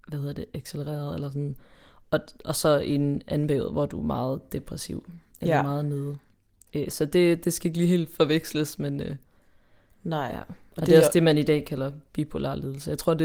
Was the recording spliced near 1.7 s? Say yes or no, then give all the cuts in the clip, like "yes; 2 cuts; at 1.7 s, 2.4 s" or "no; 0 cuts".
no; 0 cuts